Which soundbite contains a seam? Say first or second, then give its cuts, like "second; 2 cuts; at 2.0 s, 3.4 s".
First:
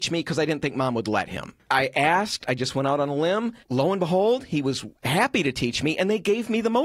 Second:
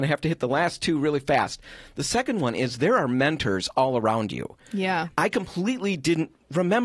first; 2 cuts; at 1.6 s, 3.6 s